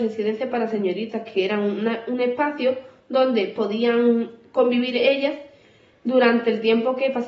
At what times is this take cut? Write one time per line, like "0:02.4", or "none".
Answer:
none